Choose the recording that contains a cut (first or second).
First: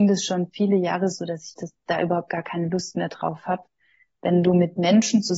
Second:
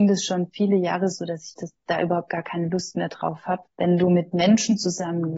second